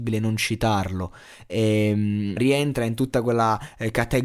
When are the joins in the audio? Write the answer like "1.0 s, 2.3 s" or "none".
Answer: 2.4 s